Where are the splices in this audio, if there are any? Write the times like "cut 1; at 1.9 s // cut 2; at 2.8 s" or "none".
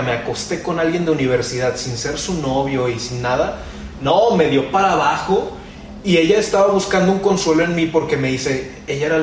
none